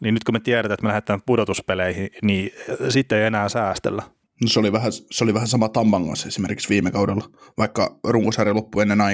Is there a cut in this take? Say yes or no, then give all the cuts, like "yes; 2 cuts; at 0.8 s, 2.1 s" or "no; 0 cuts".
yes; 1 cut; at 4.3 s